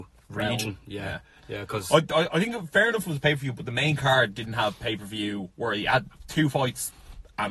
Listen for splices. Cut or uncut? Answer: uncut